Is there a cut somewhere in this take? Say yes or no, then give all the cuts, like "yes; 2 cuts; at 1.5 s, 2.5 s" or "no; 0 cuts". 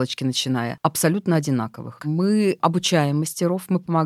yes; 1 cut; at 2.0 s